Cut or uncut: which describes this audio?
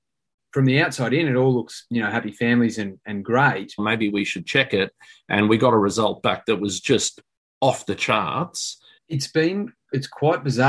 cut